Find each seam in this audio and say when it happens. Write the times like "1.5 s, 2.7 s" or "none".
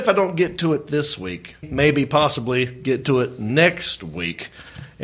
1.6 s